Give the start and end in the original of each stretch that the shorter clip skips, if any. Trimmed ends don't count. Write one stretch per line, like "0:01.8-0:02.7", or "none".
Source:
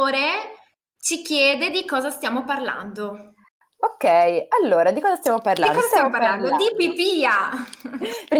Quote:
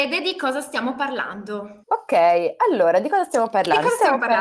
0:03.3-0:03.7

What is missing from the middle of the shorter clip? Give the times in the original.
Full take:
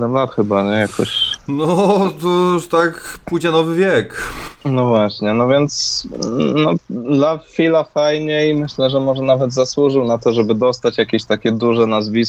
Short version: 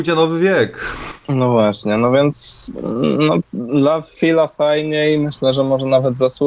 none

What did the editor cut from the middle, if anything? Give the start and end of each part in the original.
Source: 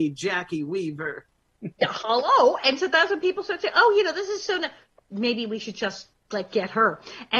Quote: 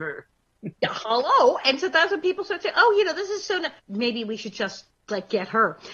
0:04.8-0:05.0

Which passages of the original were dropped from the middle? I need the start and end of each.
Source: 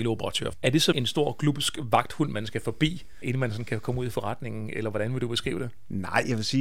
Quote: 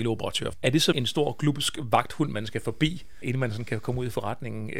none

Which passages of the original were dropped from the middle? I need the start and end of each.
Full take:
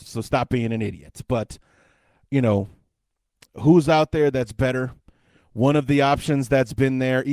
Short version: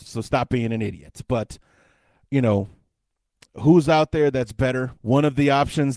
0:05.0-0:05.5

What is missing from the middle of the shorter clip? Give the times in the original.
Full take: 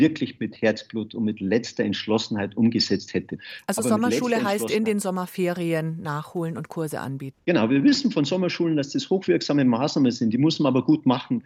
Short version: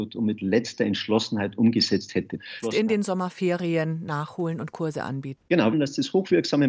0:03.6-0:04.6
0:07.7-0:08.7

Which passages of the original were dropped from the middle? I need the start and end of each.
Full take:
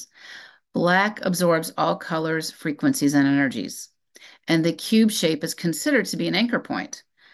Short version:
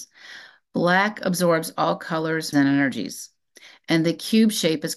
0:02.5-0:03.1

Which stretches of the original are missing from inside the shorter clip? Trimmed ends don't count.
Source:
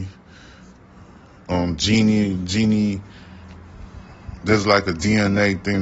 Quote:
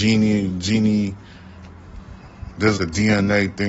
0:04.6-0:04.8

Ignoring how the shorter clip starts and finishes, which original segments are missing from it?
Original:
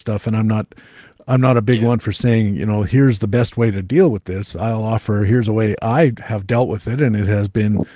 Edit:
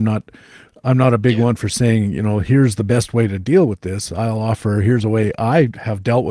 none

